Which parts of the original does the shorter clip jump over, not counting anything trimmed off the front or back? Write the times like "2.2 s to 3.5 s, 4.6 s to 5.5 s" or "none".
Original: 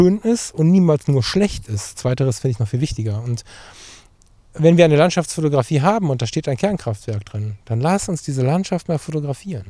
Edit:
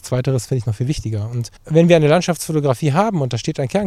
3.5 s to 4.4 s

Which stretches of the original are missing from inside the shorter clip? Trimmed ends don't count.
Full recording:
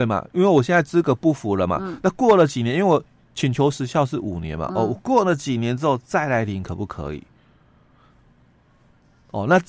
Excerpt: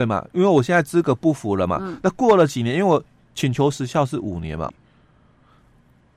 4.7 s to 7.2 s

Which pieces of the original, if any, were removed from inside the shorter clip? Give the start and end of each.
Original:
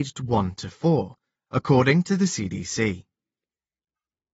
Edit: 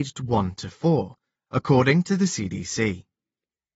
none

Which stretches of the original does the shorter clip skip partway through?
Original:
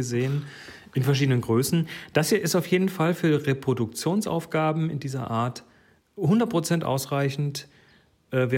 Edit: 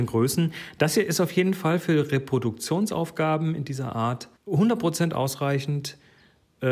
5.7 s to 6.1 s

